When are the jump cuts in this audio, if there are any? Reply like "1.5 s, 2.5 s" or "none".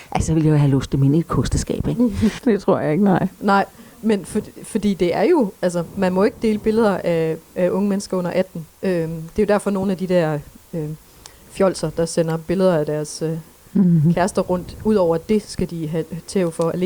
2.4 s, 8.7 s